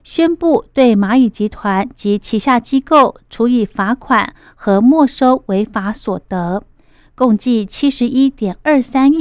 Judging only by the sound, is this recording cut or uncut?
uncut